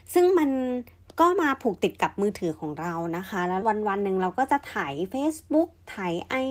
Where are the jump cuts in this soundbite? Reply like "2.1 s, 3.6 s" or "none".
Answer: 3.6 s